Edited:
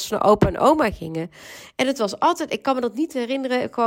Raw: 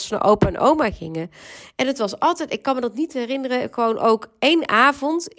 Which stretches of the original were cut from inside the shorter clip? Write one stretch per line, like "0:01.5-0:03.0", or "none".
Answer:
none